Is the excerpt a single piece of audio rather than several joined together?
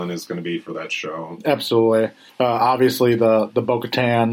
no; 1 cut; at 2.3 s

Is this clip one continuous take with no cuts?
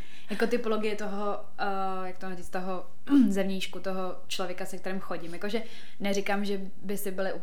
yes; 0 cuts

